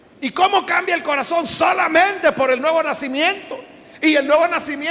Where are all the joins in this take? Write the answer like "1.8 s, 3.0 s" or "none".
none